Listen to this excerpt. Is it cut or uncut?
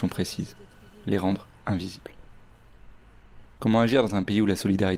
cut